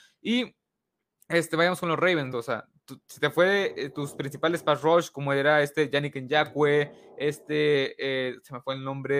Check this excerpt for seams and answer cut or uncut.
cut